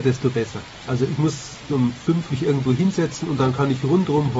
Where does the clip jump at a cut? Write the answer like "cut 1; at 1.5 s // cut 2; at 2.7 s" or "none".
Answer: cut 1; at 2.3 s

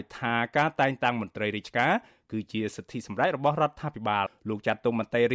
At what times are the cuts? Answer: cut 1; at 4.3 s

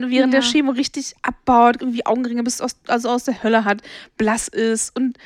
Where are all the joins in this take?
cut 1; at 1.8 s

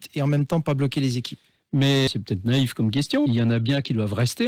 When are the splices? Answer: cut 1; at 2.1 s // cut 2; at 3.3 s

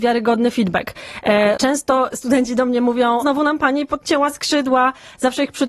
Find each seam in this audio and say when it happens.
cut 1; at 1.6 s // cut 2; at 3.2 s

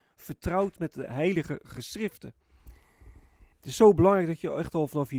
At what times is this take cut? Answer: cut 1; at 3.5 s

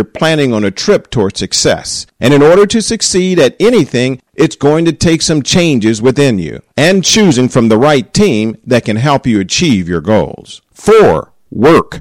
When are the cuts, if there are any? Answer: cut 1; at 10.6 s

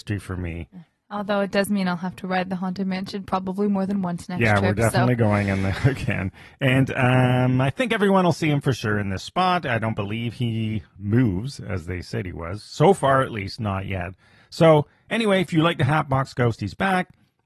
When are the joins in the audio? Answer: none

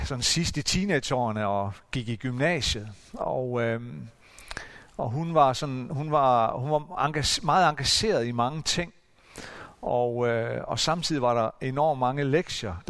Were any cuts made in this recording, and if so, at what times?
none

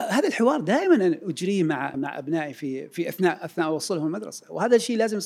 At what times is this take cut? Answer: cut 1; at 1.9 s

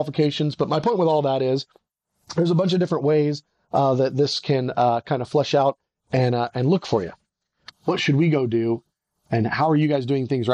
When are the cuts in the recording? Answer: cut 1; at 7.7 s

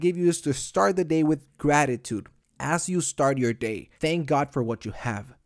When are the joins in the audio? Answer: cut 1; at 4.0 s

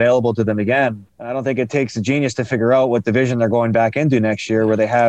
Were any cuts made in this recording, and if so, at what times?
cut 1; at 1.1 s

